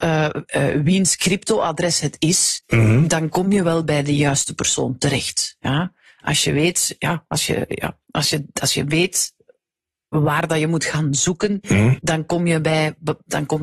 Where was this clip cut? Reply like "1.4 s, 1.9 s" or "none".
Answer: none